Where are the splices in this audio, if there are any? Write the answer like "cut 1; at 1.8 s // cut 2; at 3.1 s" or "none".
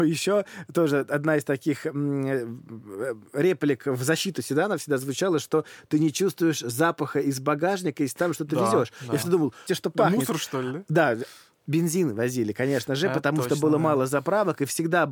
cut 1; at 9.7 s